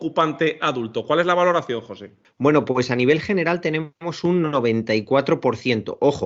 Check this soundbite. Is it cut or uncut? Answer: uncut